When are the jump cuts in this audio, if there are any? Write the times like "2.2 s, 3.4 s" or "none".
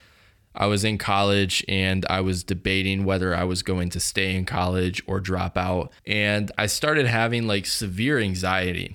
6.0 s